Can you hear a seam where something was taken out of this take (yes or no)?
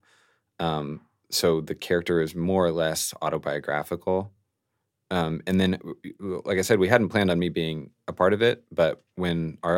no